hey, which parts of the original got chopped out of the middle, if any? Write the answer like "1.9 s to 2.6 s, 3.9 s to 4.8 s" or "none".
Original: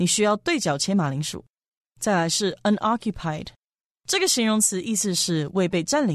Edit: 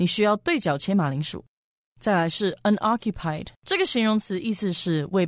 3.5 s to 4.0 s